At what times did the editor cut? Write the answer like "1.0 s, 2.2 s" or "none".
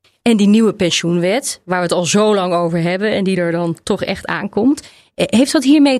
none